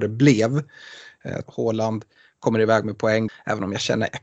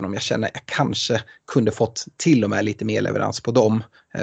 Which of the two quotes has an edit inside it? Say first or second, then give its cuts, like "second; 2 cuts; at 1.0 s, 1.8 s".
first; 2 cuts; at 1.5 s, 3.3 s